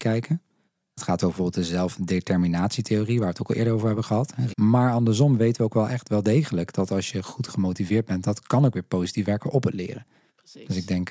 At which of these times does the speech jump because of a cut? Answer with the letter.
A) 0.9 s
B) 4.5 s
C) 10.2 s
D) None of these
B